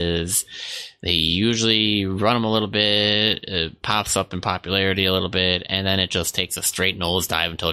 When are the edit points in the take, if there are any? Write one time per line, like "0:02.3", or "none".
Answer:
none